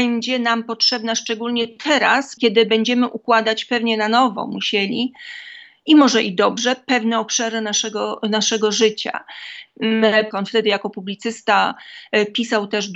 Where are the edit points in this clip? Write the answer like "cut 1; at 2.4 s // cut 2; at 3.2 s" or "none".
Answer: cut 1; at 2.4 s // cut 2; at 10.3 s